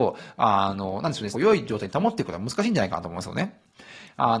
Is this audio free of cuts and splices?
no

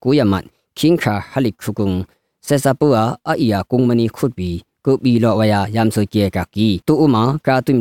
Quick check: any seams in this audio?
yes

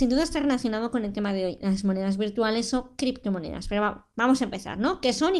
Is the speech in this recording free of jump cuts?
yes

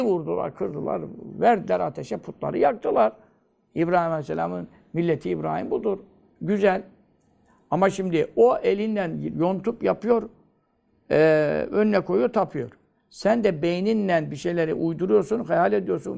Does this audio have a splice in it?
no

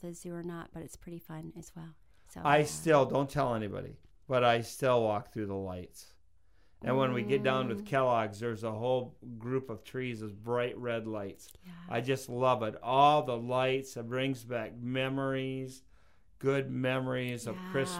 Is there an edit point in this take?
no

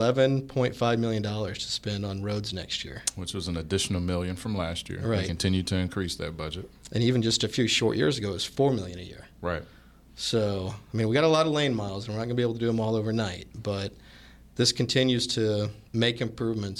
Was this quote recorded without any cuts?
no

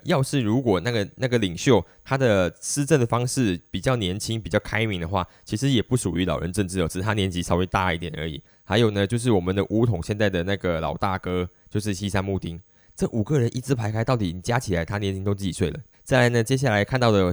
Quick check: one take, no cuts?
no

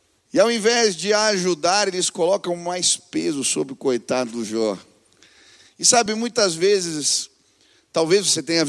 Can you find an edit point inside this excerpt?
no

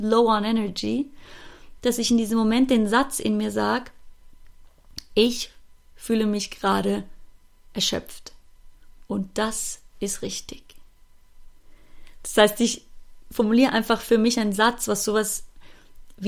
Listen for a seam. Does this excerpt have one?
no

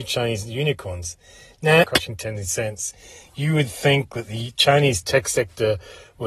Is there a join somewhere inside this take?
yes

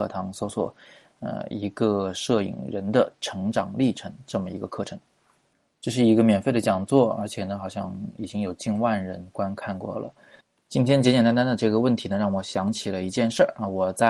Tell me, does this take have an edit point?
no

